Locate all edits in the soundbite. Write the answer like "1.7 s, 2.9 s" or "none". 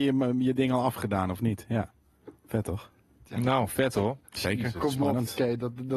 4.2 s